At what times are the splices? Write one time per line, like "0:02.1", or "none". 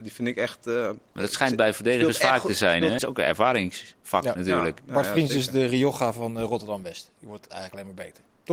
0:03.0